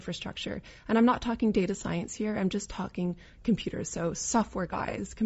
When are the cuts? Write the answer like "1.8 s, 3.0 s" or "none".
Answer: none

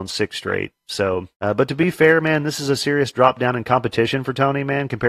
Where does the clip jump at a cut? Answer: 1.3 s

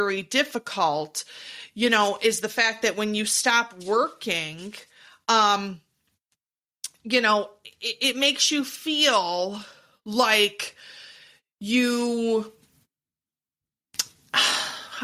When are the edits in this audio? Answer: none

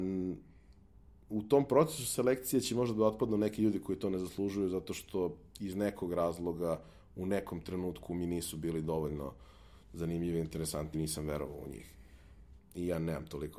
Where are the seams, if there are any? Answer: 10.9 s, 12.6 s

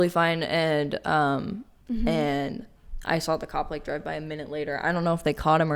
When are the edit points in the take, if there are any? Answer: 1.8 s

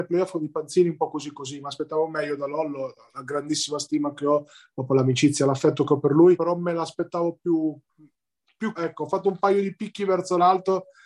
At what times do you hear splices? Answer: 6.3 s, 8.8 s

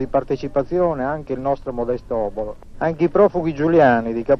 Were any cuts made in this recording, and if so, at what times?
2.7 s

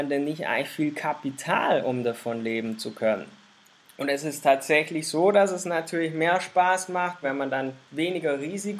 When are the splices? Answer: 7.2 s

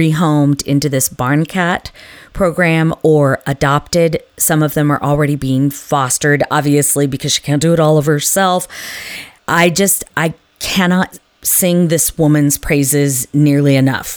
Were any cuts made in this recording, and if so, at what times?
9.4 s

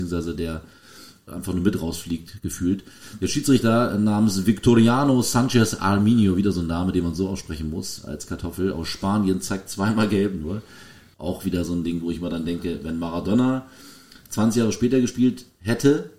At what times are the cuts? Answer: 1.3 s, 11.1 s

